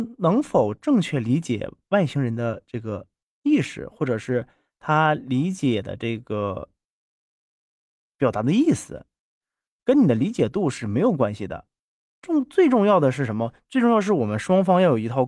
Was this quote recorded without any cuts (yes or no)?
yes